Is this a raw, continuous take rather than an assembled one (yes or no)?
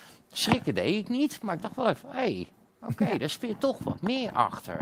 yes